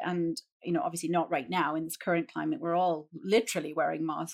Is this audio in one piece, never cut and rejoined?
yes; 0 cuts

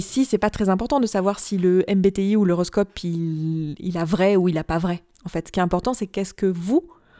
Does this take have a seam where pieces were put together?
no; 0 cuts

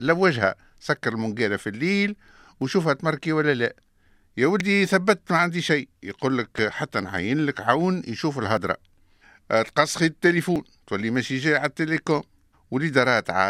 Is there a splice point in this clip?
no; 0 cuts

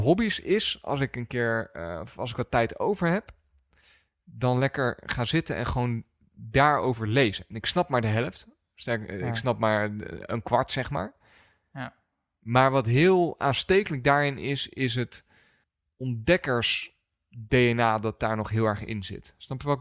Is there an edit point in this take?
no; 0 cuts

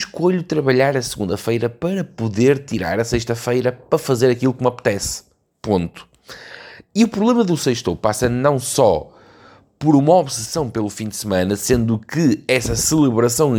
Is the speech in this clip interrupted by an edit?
no; 0 cuts

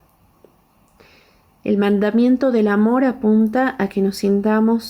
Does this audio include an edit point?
no; 0 cuts

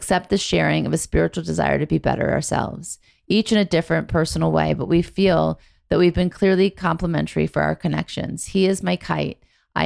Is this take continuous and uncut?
yes; 0 cuts

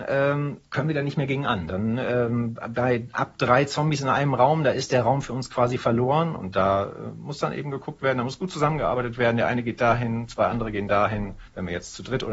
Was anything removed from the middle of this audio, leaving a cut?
yes; 1 cut; at 6.4 s

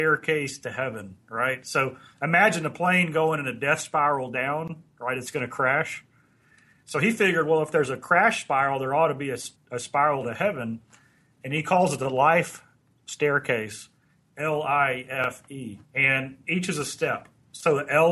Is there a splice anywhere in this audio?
yes; 2 cuts; at 9.6 s, 15.8 s

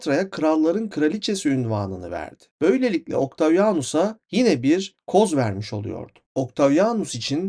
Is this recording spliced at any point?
no; 0 cuts

